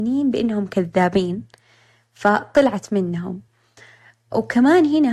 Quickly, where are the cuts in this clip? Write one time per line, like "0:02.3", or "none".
none